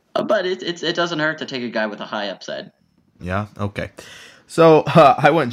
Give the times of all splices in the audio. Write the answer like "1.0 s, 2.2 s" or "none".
3.2 s